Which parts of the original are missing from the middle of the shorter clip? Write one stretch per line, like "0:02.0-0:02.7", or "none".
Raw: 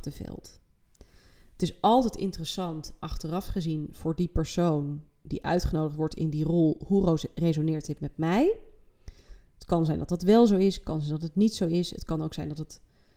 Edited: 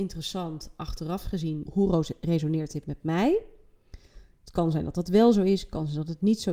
0:03.9-0:06.8

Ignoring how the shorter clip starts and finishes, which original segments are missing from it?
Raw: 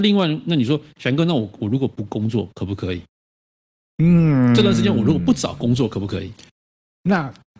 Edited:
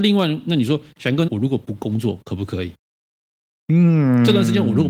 0:01.3-0:01.6

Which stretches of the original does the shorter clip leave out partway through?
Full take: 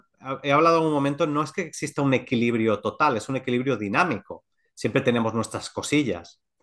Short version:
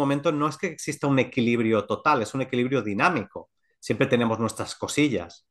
none

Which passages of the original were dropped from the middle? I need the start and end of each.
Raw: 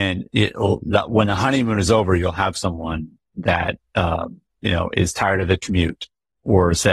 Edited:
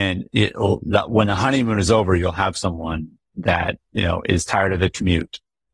0:03.8-0:04.5

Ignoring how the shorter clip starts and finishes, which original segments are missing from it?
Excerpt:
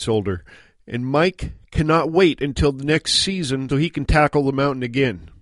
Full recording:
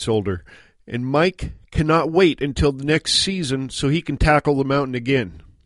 0:03.7-0:03.8

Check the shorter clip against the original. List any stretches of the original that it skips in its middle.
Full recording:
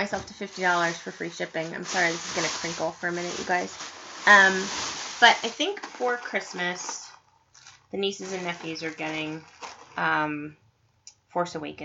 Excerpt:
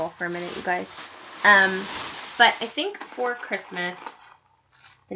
none

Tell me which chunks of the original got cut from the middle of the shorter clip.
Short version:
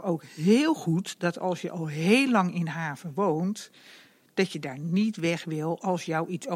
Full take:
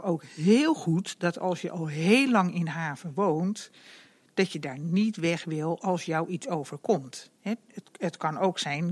none

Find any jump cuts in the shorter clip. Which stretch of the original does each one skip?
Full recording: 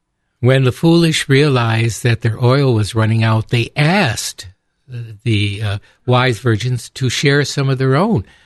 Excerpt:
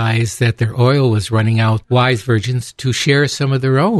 0:03.4-0:06.0

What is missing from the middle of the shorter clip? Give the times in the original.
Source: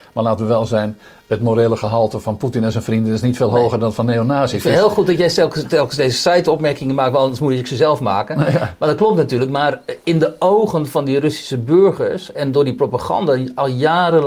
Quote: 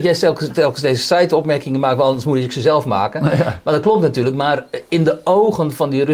none

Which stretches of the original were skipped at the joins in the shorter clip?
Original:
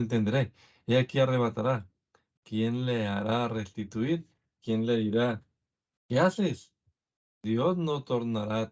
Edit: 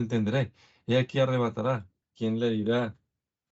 0:02.0-0:04.5

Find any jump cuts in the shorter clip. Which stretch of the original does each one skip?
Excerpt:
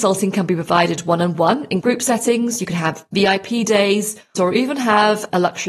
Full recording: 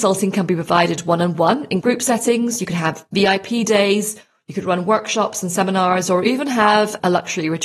0:04.3-0:06.1

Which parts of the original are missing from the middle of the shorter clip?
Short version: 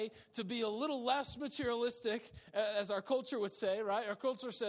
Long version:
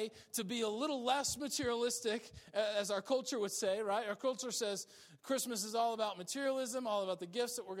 none

